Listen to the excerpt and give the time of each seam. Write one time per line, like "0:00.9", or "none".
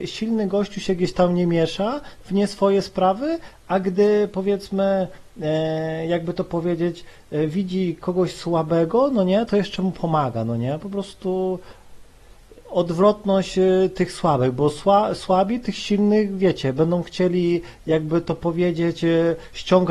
none